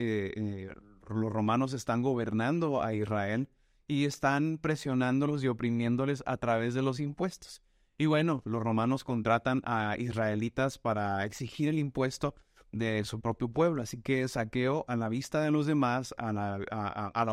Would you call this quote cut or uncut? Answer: uncut